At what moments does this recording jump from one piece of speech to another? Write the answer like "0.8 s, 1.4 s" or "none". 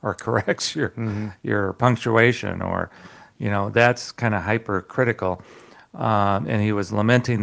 none